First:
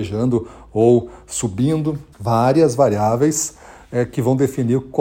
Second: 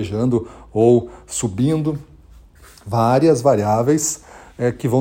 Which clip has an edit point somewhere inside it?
first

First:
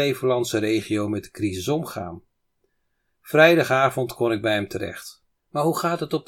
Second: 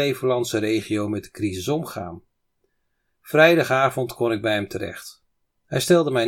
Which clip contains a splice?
first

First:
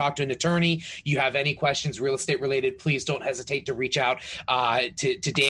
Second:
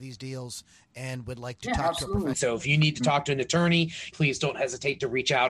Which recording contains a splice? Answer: second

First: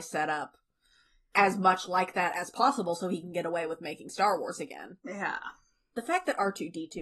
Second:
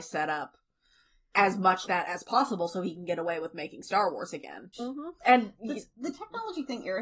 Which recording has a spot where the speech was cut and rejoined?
second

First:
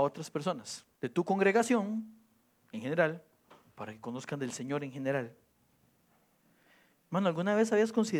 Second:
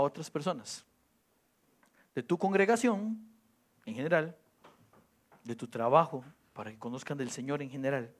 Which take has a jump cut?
first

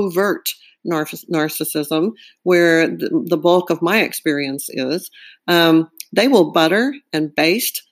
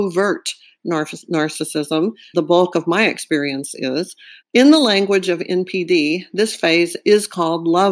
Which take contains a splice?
second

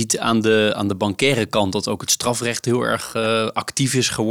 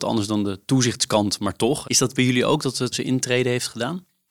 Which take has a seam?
second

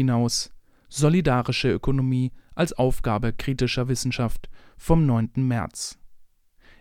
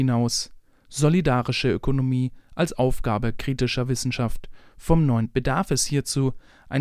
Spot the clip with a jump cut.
second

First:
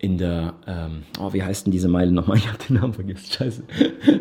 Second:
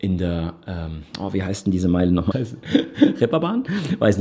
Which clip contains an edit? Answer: second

